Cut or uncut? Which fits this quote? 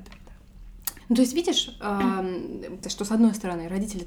cut